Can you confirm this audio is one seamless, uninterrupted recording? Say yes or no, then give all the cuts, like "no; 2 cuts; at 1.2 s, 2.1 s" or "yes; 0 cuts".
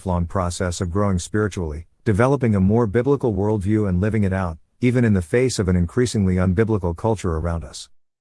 yes; 0 cuts